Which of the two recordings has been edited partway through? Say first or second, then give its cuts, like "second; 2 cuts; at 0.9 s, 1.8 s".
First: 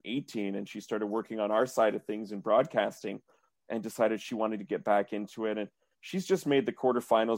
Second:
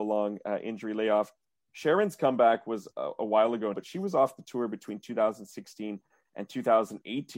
second; 1 cut; at 3.7 s